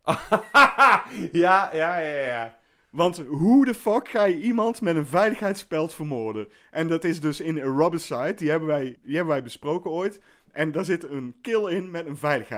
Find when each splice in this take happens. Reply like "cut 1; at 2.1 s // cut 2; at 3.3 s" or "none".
cut 1; at 9.0 s